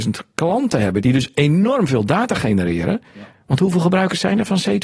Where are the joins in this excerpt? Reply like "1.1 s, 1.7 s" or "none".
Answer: 1.0 s